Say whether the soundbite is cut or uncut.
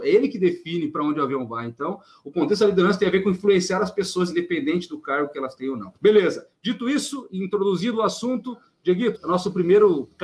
cut